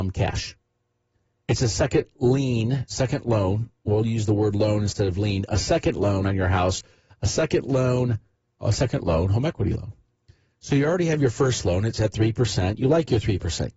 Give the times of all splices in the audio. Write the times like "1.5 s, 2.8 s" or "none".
8.5 s